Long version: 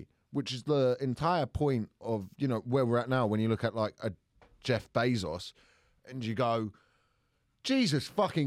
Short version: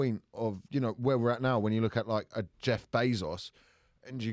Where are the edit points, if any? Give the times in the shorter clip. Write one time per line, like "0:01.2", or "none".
0:02.5